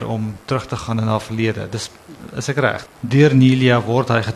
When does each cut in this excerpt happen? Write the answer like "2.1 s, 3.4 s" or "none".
2.9 s